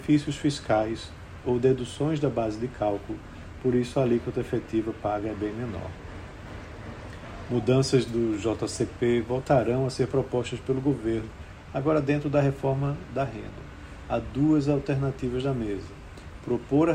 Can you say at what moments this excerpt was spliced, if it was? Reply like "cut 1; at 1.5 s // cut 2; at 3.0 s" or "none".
none